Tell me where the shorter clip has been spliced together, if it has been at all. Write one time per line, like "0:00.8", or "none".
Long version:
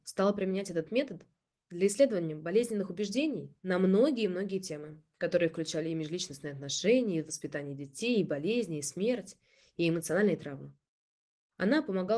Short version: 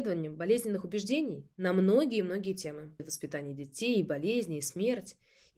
0:03.0